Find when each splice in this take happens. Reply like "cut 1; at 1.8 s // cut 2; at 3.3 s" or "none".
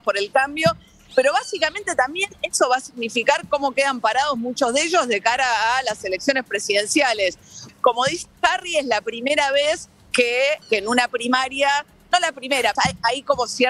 cut 1; at 7.7 s // cut 2; at 10.6 s // cut 3; at 12.8 s